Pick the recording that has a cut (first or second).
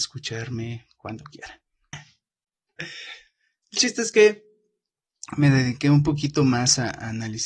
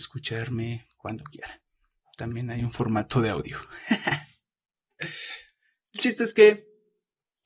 first